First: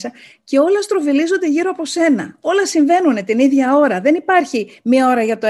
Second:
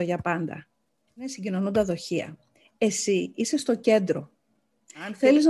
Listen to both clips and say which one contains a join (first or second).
second